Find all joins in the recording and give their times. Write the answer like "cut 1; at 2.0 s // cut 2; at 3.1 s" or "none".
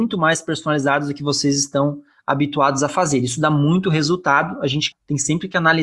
cut 1; at 4.9 s